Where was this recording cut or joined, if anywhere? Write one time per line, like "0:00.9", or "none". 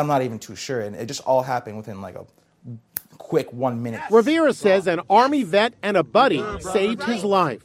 none